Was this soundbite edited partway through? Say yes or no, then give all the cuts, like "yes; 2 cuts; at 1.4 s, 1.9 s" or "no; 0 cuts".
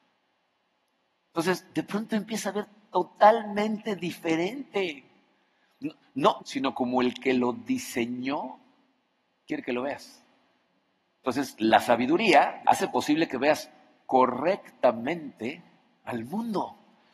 yes; 2 cuts; at 6.4 s, 12.6 s